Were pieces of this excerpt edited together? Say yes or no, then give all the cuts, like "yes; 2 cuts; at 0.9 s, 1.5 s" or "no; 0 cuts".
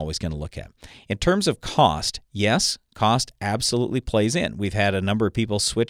no; 0 cuts